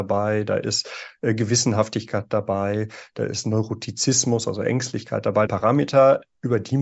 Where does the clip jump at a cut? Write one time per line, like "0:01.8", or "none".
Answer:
0:05.5